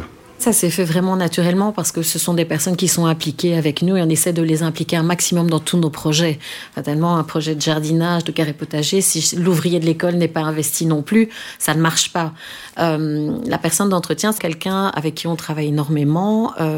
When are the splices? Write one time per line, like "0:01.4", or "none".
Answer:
0:14.4